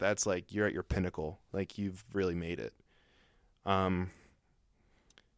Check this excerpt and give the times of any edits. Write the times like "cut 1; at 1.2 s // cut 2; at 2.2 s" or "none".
none